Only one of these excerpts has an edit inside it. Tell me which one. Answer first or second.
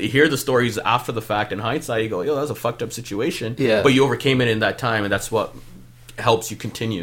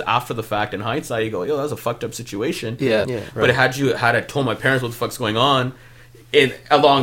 second